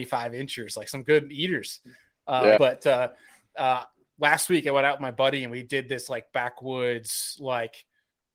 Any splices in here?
yes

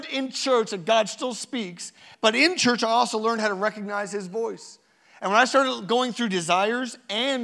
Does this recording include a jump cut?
no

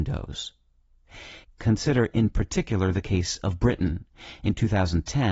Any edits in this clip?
yes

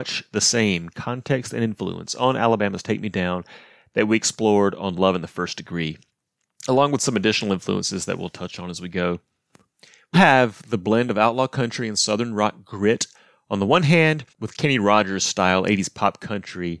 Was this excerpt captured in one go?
no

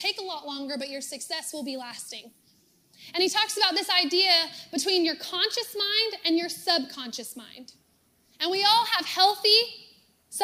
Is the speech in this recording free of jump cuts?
yes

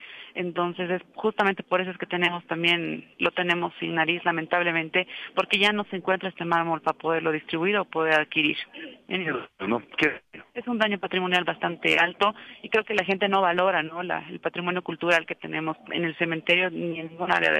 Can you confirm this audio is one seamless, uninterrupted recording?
yes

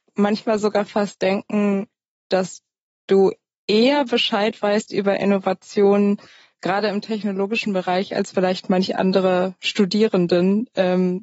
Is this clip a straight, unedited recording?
yes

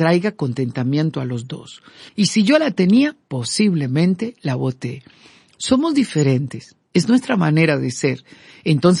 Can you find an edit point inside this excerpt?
yes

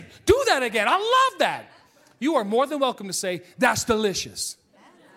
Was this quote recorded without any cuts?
yes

